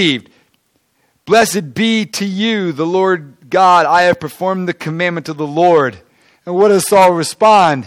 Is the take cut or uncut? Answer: uncut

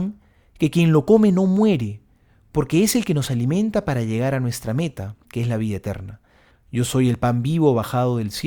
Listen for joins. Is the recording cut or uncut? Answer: cut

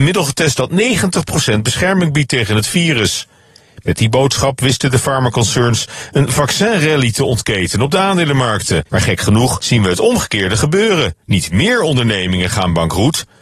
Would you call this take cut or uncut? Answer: cut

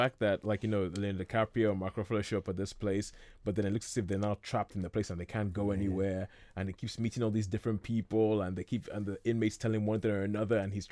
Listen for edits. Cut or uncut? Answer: uncut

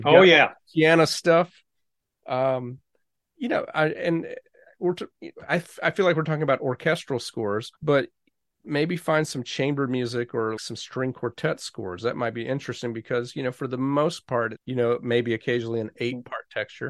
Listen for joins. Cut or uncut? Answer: cut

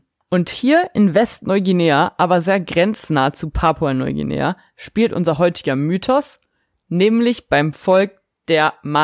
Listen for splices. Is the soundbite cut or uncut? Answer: uncut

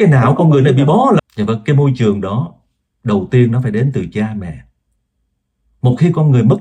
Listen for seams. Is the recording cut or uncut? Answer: cut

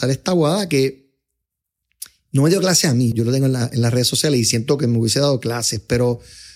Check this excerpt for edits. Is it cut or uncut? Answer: cut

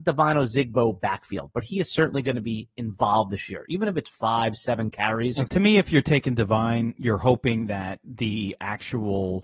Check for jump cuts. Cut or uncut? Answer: cut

